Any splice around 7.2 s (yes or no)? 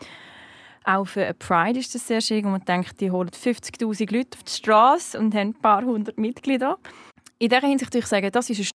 no